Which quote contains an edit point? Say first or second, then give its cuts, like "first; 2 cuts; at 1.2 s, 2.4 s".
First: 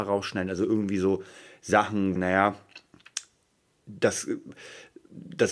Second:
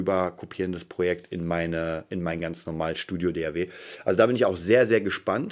first; 1 cut; at 2.2 s